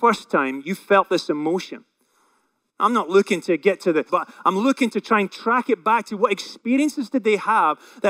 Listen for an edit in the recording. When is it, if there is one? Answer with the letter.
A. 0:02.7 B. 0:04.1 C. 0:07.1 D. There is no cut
B